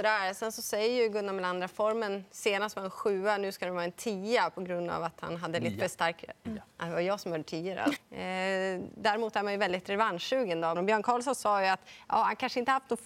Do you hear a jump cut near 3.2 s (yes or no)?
no